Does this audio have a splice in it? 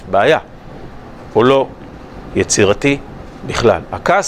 no; 0 cuts

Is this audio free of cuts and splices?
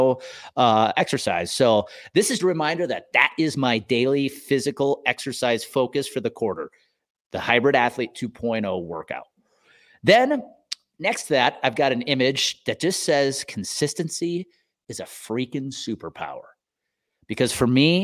no; 1 cut; at 2.4 s

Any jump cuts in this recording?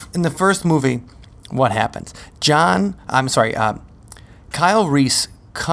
no; 0 cuts

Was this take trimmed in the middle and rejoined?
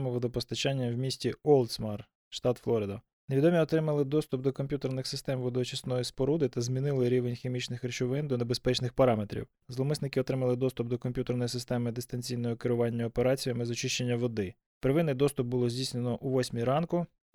yes; 1 cut; at 9.6 s

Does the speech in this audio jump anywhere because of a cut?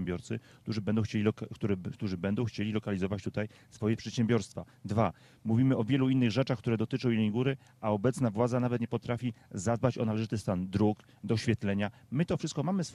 no; 0 cuts

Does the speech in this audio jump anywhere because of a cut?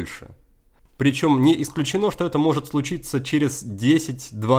no; 0 cuts

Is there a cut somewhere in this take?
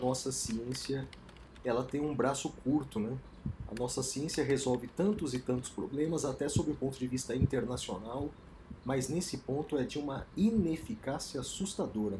no; 0 cuts

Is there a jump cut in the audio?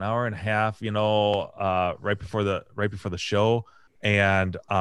yes; 1 cut; at 3.9 s

